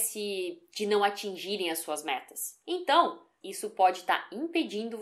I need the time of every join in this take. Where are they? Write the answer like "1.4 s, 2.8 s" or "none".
3.4 s